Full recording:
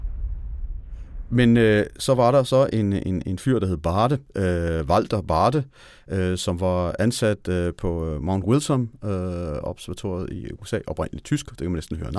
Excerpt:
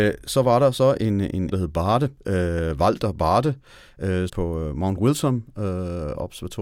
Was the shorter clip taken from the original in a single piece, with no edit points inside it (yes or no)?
no